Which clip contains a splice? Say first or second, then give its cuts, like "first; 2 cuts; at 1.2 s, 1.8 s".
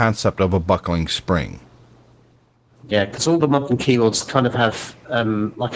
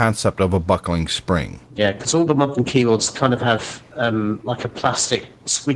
second; 1 cut; at 1.7 s